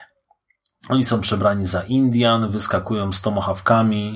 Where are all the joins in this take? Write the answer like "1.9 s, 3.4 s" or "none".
none